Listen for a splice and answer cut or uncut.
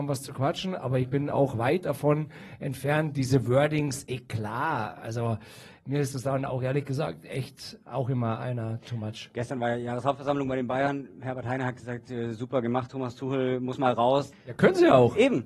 cut